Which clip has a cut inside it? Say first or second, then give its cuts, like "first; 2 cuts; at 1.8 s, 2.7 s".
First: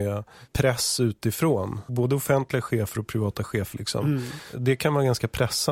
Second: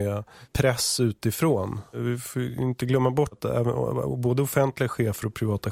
first; 2 cuts; at 1.9 s, 3.7 s